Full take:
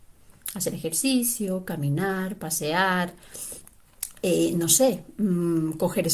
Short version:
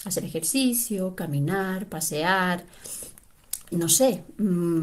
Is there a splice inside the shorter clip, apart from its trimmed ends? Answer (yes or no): yes